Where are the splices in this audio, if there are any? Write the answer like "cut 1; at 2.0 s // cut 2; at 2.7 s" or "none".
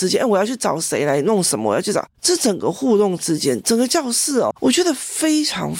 cut 1; at 4.5 s